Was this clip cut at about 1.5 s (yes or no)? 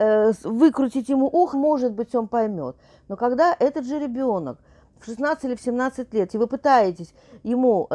yes